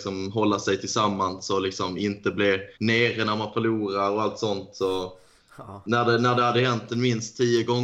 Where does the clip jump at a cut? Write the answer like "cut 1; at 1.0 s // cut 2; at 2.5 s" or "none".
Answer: cut 1; at 2.7 s